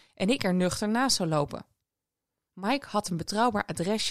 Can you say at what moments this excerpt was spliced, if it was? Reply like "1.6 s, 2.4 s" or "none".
none